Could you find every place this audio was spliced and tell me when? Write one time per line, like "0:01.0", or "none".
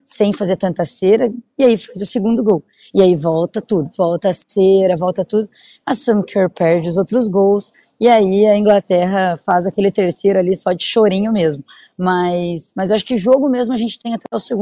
none